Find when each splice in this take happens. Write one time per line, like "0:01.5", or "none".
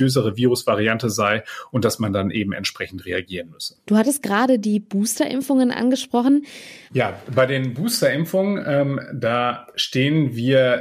0:06.9